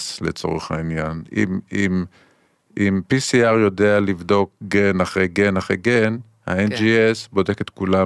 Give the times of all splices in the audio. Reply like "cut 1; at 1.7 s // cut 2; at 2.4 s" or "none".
none

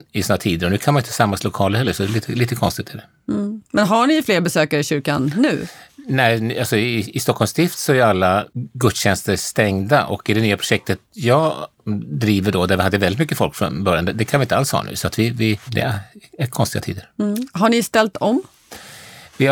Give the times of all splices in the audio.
cut 1; at 15.7 s

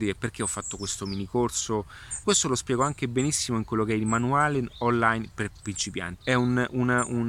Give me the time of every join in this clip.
cut 1; at 2.2 s // cut 2; at 6.2 s

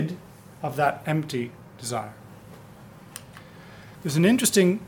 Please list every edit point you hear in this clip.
cut 1; at 4.0 s

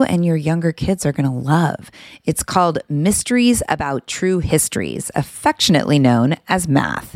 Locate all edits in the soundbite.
none

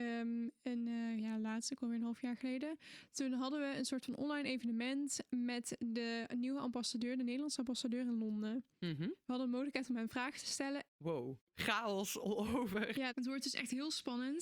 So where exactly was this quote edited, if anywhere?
cut 1; at 10.9 s

